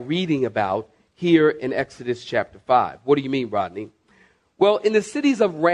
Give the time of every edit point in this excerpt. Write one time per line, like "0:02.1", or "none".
none